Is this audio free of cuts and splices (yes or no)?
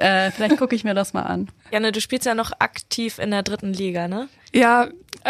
no